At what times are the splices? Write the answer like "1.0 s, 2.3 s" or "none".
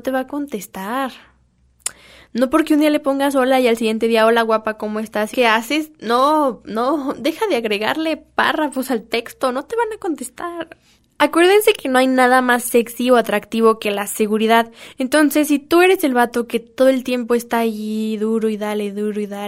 5.3 s